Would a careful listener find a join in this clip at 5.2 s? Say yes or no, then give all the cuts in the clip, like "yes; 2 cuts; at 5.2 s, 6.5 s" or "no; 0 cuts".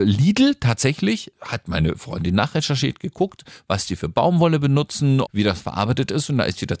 yes; 1 cut; at 5.2 s